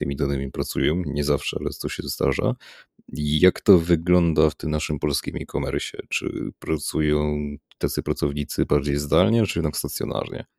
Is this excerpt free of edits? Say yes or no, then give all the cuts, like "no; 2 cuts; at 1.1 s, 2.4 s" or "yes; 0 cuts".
yes; 0 cuts